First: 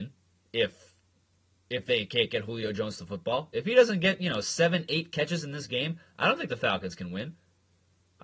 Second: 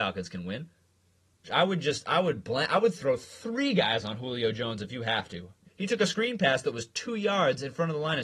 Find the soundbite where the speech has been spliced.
second; 2 cuts; at 1.4 s, 5.6 s

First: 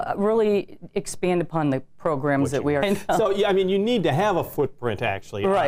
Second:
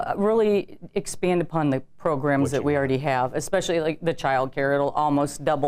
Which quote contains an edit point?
first; 1 cut; at 2.8 s

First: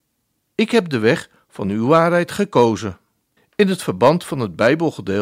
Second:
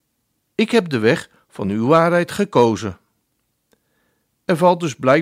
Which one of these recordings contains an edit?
first; 1 cut; at 3.4 s

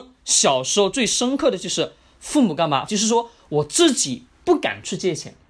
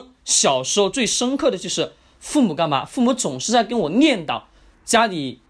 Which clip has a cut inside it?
first; 1 cut; at 2.9 s

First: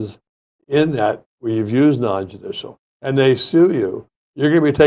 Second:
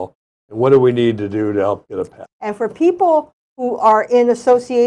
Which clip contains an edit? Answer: second; 1 cut; at 2.2 s

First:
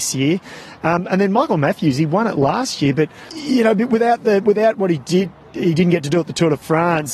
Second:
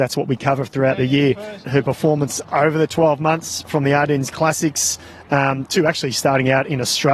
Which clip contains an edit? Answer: second; 1 cut; at 1.6 s

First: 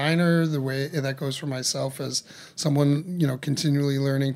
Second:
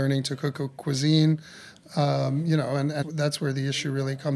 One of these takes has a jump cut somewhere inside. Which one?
second; 2 cuts; at 1.7 s, 3.0 s

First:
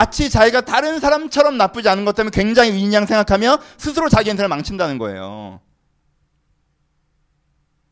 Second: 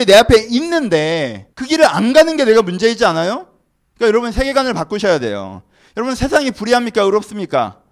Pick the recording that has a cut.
second; 2 cuts; at 1.5 s, 3.9 s

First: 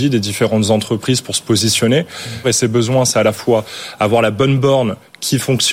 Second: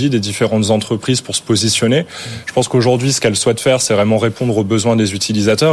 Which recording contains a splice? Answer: first; 1 cut; at 2.4 s

